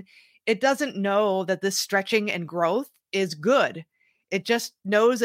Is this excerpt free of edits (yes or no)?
yes